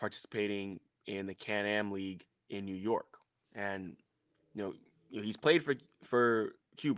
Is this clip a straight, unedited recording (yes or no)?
no